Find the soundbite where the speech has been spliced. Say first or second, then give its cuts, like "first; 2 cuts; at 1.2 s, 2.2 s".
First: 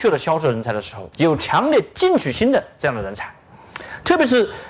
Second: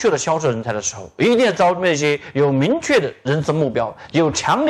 first; 1 cut; at 1.1 s